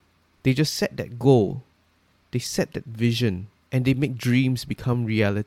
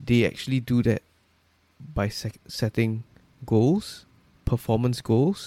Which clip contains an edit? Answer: first; 1 cut; at 3.6 s

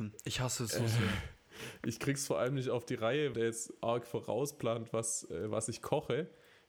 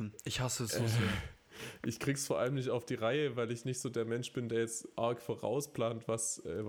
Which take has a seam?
first; 1 cut; at 3.3 s

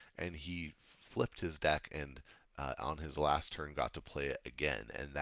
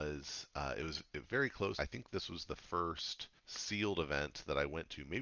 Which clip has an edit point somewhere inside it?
second; 2 cuts; at 1.8 s, 3.4 s

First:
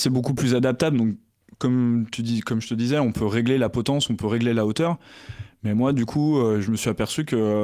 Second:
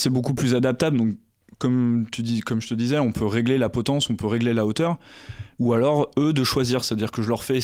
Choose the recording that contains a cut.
second; 1 cut; at 5.6 s

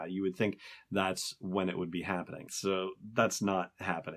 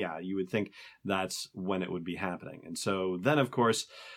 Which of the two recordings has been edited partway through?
first; 1 cut; at 2.5 s

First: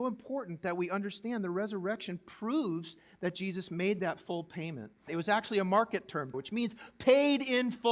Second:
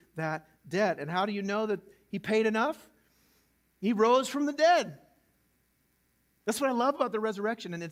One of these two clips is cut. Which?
first; 2 cuts; at 5.1 s, 6.3 s

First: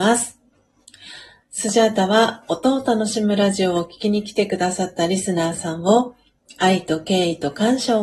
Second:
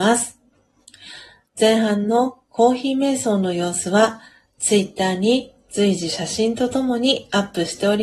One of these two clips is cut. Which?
first; 1 cut; at 1.4 s

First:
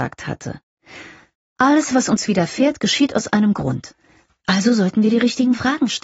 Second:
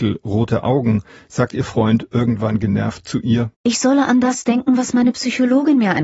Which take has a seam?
second; 1 cut; at 3.5 s

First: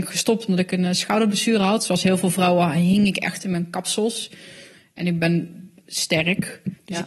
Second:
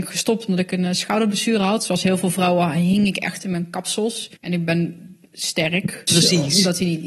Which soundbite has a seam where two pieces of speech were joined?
second; 2 cuts; at 4.4 s, 6.1 s

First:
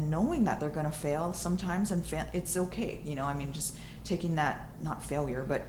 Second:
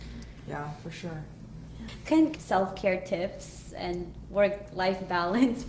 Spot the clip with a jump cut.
second; 1 cut; at 2.3 s

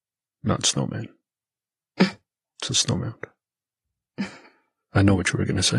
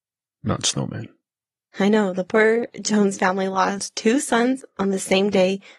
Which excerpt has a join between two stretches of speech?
second; 1 cut; at 1.7 s

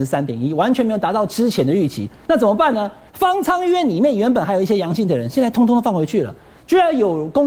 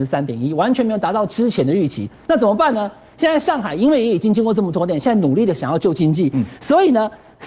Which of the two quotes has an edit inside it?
first; 1 cut; at 3.1 s

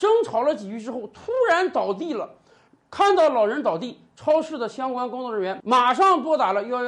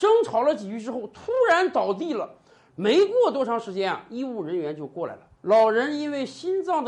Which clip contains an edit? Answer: second; 2 cuts; at 2.7 s, 5.4 s

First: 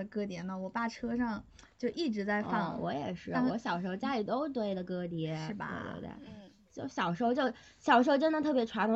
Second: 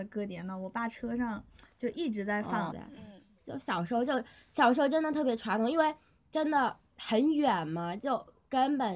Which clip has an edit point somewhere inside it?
second; 1 cut; at 2.7 s

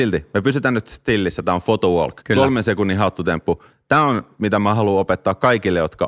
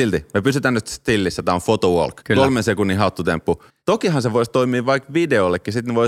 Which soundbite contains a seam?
second; 1 cut; at 3.7 s

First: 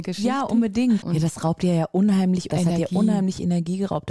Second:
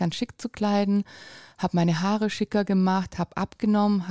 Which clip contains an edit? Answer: first; 2 cuts; at 1.0 s, 2.5 s

